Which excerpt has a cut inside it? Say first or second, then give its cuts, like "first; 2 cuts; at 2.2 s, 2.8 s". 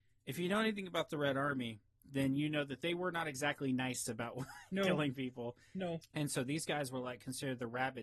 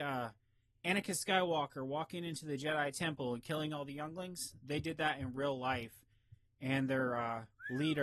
first; 1 cut; at 6.0 s